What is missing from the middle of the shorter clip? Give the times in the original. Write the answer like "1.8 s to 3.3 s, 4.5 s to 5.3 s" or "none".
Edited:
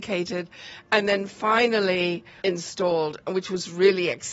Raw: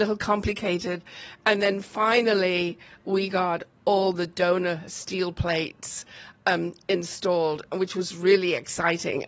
3.0 s to 6.9 s